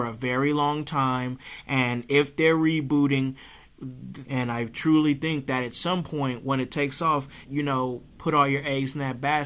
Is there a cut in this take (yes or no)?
yes